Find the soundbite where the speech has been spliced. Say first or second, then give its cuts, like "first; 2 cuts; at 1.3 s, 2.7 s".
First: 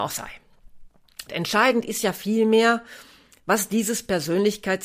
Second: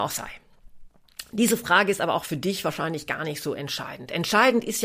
first; 1 cut; at 1.3 s